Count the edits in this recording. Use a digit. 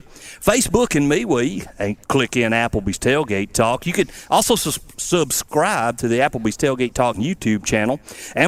1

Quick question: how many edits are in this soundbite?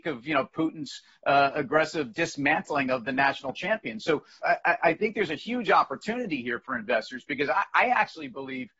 1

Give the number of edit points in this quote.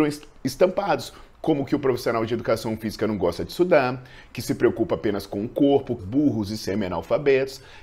1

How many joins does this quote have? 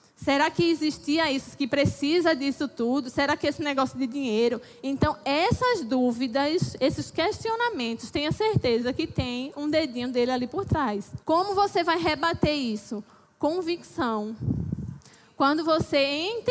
1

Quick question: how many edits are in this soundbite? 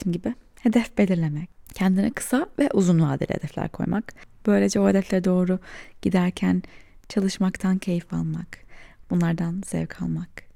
2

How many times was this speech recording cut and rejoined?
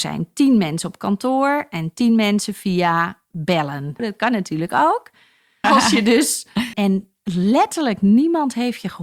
3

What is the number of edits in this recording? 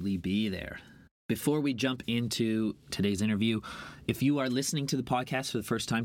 0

